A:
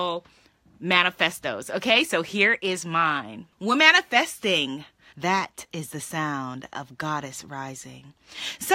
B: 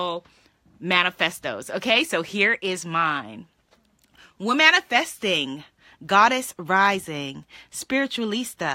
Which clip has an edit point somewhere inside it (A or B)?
A